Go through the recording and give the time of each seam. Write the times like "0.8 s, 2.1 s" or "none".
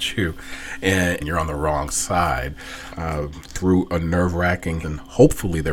1.2 s, 2.9 s, 4.8 s